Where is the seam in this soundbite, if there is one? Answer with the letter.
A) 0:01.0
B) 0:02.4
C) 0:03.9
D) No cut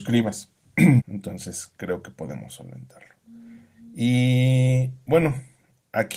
A